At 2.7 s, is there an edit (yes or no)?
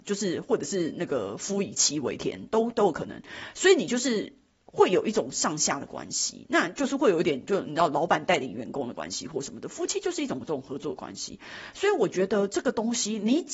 yes